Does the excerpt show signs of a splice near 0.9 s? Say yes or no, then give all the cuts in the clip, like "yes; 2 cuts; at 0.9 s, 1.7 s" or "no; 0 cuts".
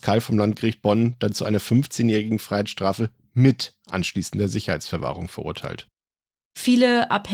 no; 1 cut; at 6.4 s